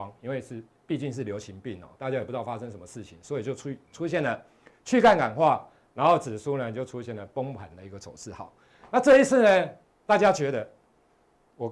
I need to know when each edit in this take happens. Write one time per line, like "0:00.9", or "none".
none